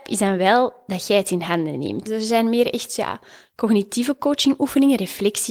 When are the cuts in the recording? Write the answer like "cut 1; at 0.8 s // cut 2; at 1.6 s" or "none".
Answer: cut 1; at 2.1 s